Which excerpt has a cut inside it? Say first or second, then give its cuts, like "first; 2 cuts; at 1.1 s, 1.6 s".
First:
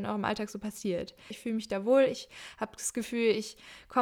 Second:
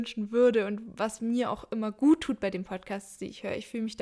first; 1 cut; at 1.3 s